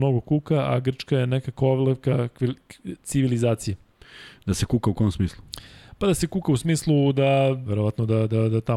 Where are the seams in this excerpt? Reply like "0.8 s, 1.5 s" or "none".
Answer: 7.7 s